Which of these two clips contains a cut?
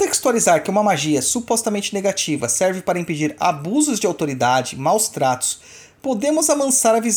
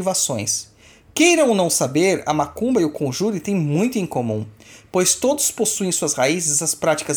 first; 1 cut; at 6.0 s

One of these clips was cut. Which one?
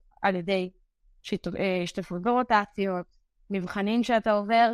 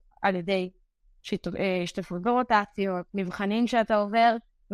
second; 1 cut; at 3.1 s

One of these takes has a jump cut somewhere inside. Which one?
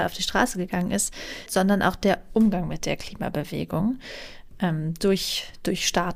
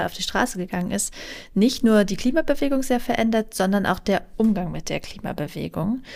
first; 1 cut; at 1.5 s

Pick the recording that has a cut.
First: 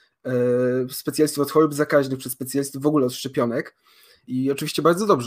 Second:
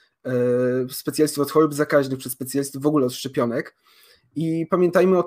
first; 1 cut; at 4.2 s

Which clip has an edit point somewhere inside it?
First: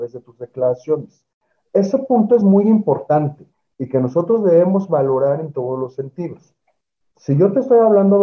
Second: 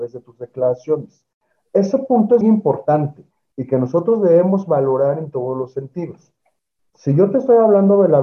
second; 1 cut; at 2.4 s

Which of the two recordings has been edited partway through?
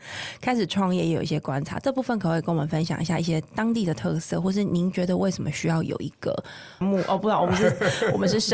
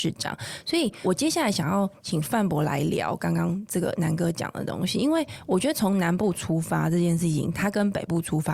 first; 1 cut; at 6.8 s

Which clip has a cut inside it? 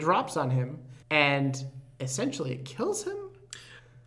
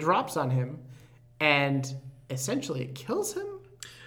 first; 1 cut; at 1.0 s

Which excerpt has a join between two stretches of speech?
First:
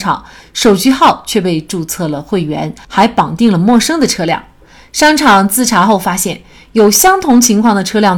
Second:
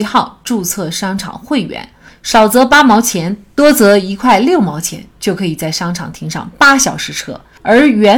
second; 1 cut; at 2.1 s

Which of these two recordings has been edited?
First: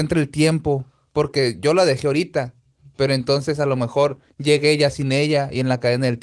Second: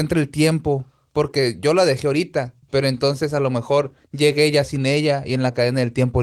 second; 1 cut; at 2.6 s

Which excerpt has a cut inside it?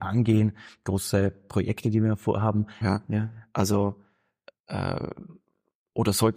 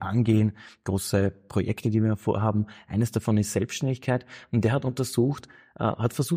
first; 1 cut; at 2.8 s

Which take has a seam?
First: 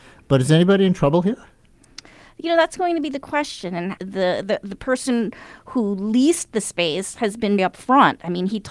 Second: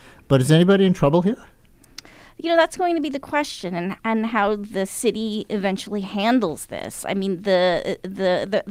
first; 2 cuts; at 4.0 s, 7.6 s

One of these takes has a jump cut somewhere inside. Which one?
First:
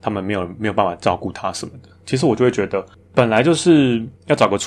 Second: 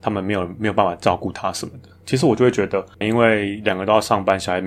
second; 1 cut; at 3.0 s

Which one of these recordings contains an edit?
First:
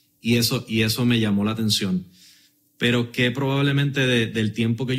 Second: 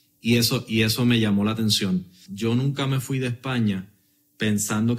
second; 1 cut; at 2.3 s

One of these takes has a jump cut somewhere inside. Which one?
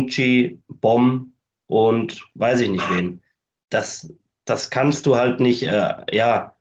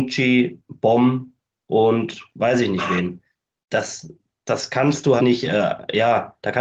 second; 1 cut; at 5.2 s

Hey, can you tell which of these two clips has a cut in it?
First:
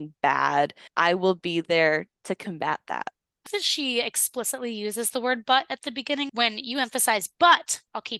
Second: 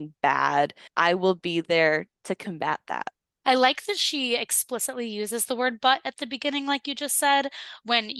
first; 2 cuts; at 3.5 s, 6.3 s

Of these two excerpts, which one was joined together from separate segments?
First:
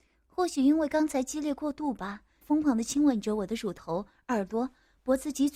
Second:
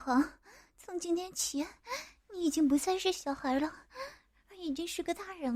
first; 1 cut; at 2.4 s

